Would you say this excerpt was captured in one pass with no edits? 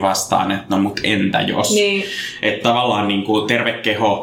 yes; 0 cuts

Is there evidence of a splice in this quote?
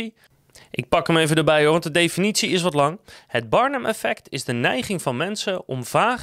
no; 0 cuts

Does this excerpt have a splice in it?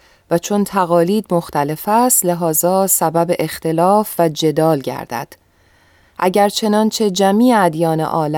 no; 0 cuts

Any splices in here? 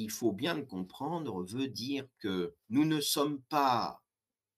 yes; 1 cut; at 2.6 s

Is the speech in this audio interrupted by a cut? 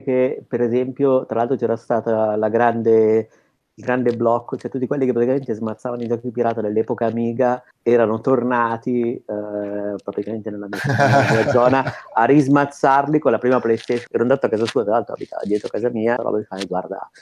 yes; 3 cuts; at 7.7 s, 14.1 s, 16.2 s

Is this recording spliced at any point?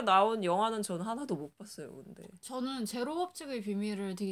no; 0 cuts

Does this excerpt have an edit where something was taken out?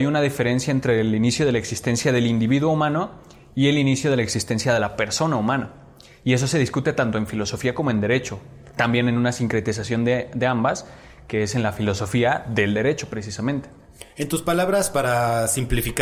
no; 0 cuts

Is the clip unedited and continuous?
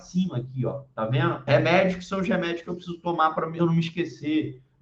no; 2 cuts; at 1.5 s, 3.6 s

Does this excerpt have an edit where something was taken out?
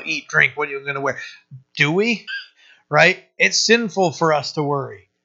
yes; 1 cut; at 2.3 s

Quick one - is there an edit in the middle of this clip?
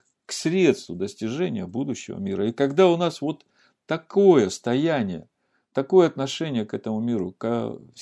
no; 0 cuts

